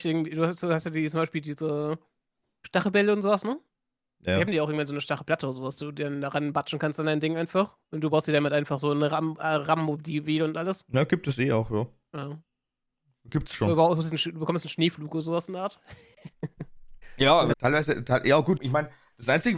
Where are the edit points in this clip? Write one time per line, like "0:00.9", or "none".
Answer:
0:17.5
0:18.6